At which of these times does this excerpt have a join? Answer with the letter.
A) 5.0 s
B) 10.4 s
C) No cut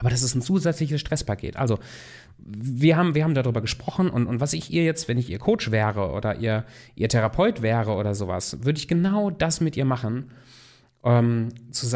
C